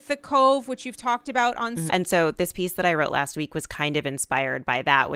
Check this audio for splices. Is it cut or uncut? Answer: cut